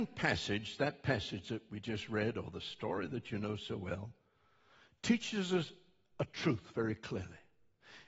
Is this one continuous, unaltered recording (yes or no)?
yes